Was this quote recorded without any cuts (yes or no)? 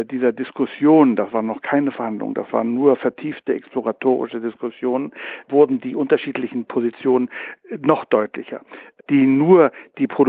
no